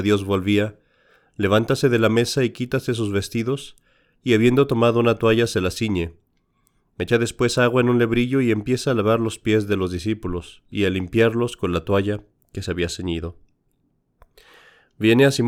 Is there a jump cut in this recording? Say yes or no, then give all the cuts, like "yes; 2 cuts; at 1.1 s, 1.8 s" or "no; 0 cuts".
no; 0 cuts